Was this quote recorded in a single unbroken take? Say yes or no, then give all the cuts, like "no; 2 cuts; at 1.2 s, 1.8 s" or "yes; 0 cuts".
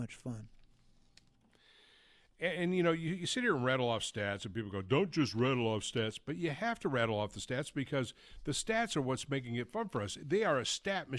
yes; 0 cuts